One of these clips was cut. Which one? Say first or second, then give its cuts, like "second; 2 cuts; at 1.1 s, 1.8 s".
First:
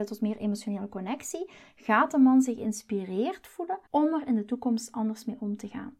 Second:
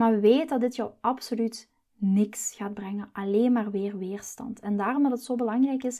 first; 1 cut; at 3.9 s